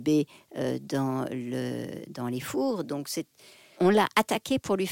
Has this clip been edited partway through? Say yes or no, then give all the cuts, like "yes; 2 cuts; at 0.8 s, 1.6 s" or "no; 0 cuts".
yes; 1 cut; at 3.7 s